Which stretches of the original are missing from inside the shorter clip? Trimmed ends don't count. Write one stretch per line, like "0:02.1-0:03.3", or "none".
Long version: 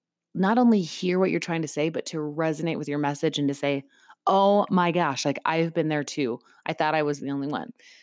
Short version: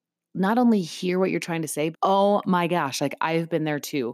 0:01.9-0:04.2